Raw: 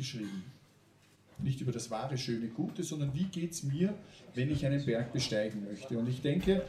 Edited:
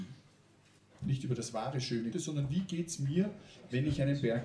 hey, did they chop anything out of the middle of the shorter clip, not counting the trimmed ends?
yes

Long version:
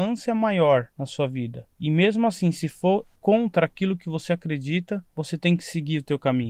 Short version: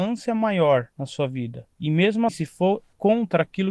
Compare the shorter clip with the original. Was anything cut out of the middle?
yes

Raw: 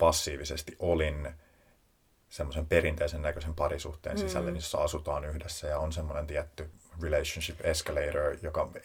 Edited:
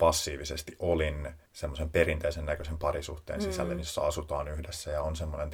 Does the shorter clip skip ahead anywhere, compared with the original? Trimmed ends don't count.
yes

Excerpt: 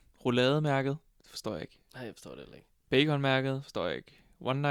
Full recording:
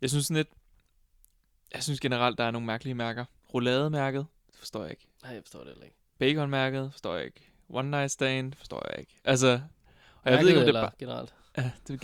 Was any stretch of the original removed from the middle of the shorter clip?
no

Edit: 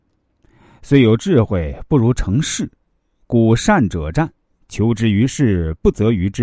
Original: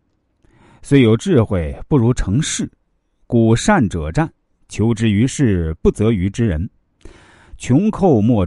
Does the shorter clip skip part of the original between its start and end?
no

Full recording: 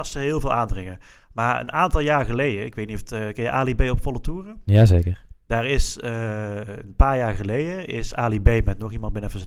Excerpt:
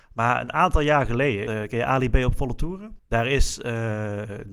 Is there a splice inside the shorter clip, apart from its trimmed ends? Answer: yes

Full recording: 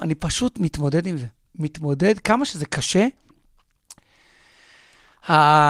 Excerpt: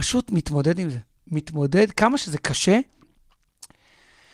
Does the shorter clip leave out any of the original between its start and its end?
no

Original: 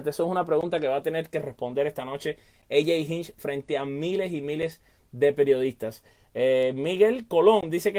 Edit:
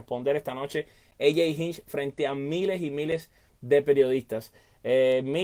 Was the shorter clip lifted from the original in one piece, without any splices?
yes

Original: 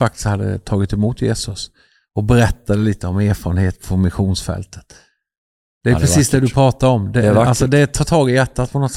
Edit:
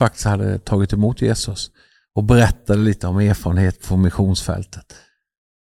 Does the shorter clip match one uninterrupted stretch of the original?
yes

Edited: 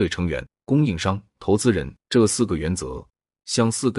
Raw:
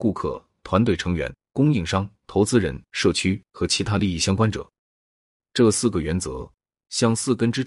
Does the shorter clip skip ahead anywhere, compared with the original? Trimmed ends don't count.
yes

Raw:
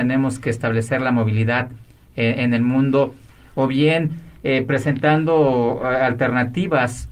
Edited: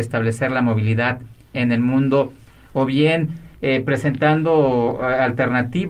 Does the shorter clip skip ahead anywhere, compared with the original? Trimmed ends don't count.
yes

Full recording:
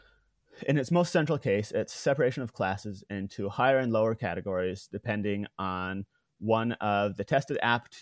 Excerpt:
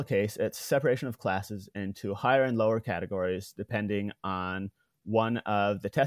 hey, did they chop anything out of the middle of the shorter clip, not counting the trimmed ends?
no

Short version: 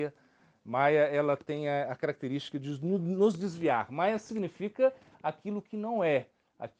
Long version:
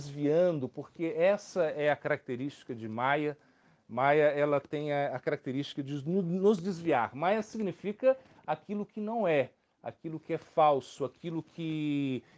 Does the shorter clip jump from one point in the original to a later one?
no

